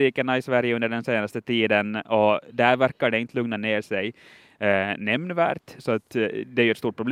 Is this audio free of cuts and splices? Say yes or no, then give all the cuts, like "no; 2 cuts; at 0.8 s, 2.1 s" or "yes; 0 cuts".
yes; 0 cuts